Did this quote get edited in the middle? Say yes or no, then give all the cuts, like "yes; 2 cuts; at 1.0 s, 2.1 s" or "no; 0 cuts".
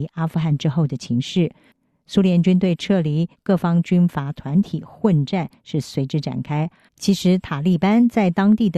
yes; 2 cuts; at 3.3 s, 6.9 s